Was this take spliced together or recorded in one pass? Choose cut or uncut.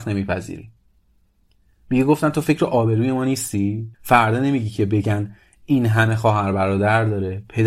cut